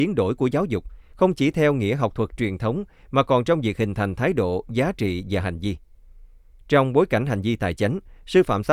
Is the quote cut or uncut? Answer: uncut